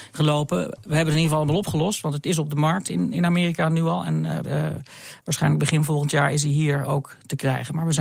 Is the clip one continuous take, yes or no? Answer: no